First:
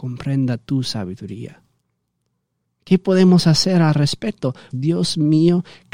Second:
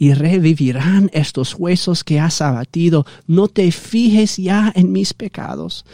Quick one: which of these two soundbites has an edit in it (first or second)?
first